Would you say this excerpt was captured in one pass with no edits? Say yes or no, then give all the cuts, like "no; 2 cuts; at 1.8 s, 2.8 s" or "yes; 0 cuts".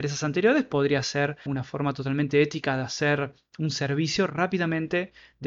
no; 1 cut; at 1.5 s